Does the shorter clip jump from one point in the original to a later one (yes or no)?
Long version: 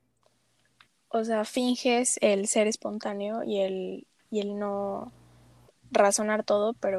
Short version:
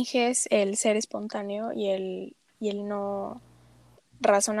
no